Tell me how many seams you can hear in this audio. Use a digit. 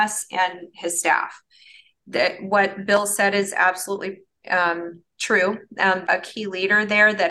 2